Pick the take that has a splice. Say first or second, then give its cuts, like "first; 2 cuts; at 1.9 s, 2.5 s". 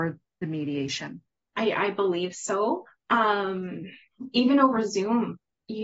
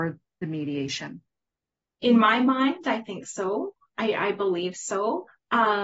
first; 1 cut; at 1.5 s